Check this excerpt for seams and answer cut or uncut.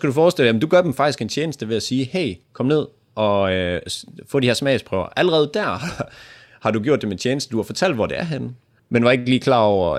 cut